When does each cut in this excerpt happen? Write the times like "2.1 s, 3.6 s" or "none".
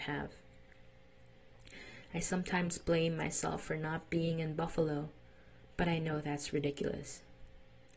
none